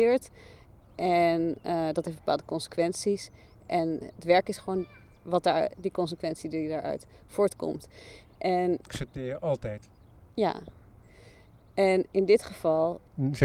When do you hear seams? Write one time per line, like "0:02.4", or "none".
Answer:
0:08.9